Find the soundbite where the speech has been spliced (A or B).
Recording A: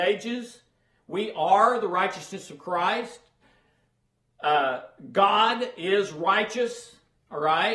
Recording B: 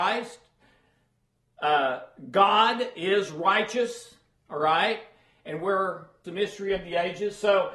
B